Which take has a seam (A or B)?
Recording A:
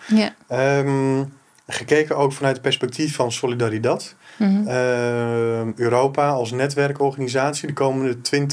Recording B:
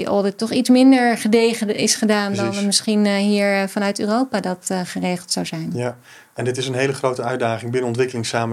B